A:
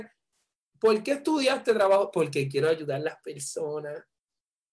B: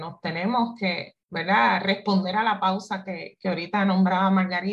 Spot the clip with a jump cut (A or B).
B